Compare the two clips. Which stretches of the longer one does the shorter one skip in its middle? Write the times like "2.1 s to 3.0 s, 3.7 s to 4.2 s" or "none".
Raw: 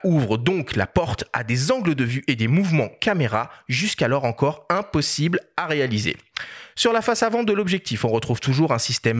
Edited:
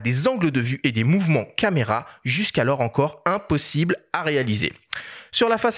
none